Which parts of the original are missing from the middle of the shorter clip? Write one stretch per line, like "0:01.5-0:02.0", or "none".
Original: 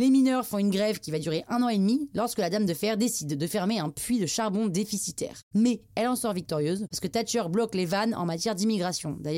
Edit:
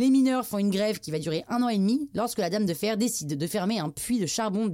none